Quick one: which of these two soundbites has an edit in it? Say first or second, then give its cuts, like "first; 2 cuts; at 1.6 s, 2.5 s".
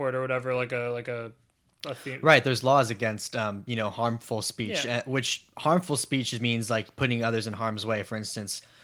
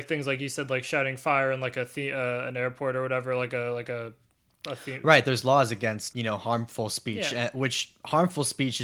second; 1 cut; at 6.1 s